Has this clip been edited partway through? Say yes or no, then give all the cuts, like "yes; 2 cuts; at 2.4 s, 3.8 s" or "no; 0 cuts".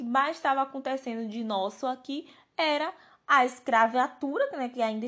no; 0 cuts